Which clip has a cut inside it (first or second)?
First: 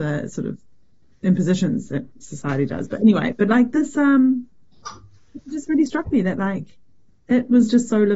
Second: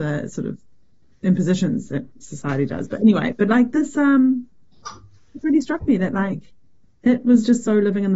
second